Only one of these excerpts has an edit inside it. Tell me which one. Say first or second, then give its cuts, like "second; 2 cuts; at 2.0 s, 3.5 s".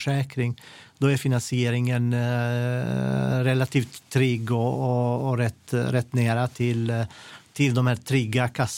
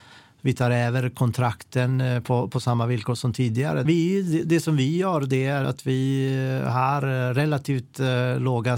second; 2 cuts; at 3.8 s, 5.6 s